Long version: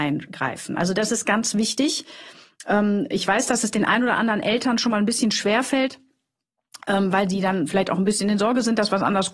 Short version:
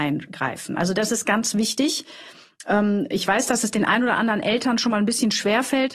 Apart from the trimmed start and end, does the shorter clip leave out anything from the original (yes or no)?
no